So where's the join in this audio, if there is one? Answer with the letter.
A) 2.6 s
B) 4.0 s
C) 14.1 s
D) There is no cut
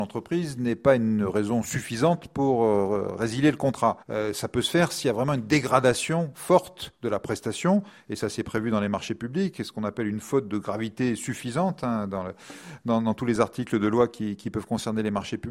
B